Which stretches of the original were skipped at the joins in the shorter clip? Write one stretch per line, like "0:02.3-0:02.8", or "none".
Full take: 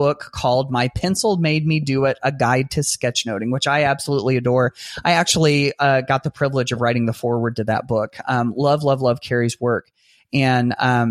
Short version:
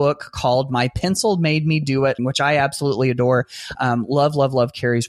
0:02.2-0:03.5
0:05.0-0:08.2